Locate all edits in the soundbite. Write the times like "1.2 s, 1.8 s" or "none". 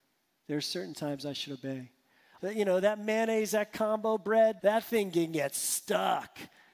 2.4 s, 4.6 s